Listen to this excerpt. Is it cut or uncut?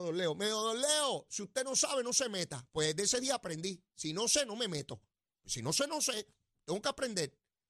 uncut